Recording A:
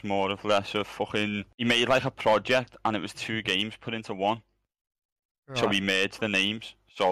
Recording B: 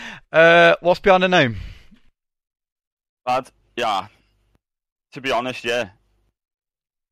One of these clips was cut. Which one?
A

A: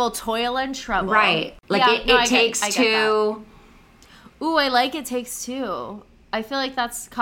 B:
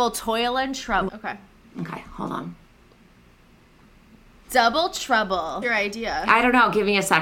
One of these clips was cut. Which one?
B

